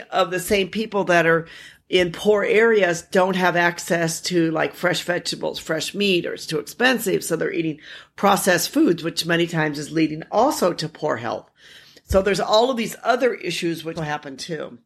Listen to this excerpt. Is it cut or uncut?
cut